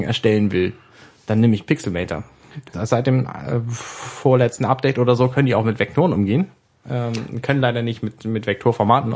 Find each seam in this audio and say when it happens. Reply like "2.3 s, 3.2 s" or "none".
2.7 s